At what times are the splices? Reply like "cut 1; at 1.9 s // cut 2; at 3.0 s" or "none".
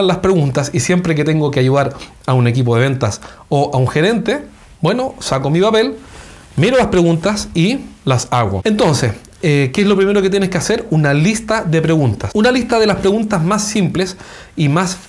none

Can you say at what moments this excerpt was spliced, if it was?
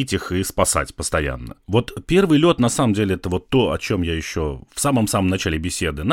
cut 1; at 1.6 s

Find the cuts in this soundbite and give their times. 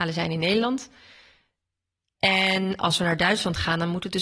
none

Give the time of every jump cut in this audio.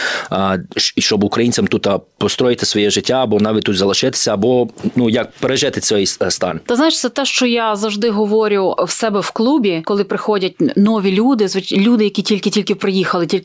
none

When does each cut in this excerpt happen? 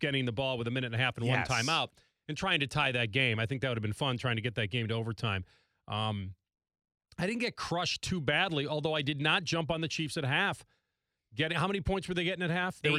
none

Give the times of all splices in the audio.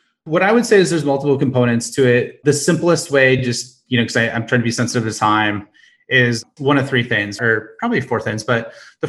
none

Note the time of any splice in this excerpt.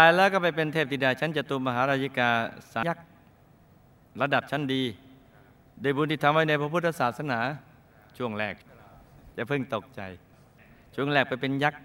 cut 1; at 2.8 s

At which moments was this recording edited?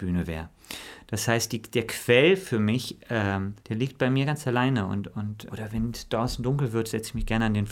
cut 1; at 3.6 s // cut 2; at 5.5 s

